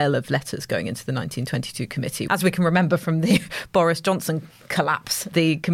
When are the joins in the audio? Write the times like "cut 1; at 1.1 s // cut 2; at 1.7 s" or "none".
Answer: cut 1; at 2.3 s